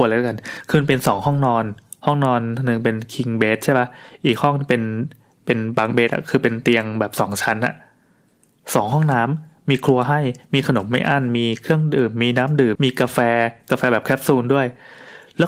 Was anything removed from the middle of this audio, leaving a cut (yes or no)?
yes